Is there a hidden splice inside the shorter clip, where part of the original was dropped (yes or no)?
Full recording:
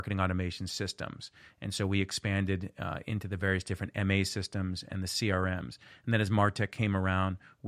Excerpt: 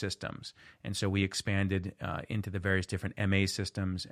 no